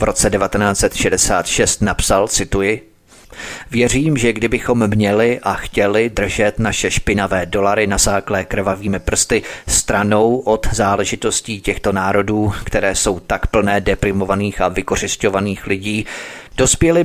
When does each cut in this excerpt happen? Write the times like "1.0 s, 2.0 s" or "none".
none